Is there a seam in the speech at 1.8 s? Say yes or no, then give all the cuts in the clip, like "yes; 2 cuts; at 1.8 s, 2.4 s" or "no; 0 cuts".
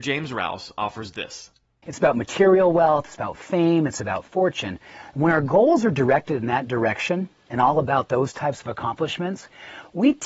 yes; 1 cut; at 1.8 s